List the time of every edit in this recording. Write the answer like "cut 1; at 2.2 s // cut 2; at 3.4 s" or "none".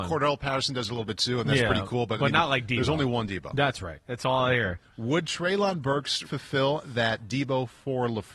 cut 1; at 4.0 s // cut 2; at 6.2 s